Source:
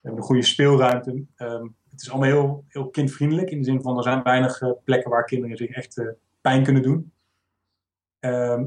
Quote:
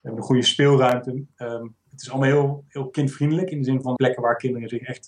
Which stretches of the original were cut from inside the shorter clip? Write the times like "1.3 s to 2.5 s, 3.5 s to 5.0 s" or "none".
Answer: 4.0 s to 4.8 s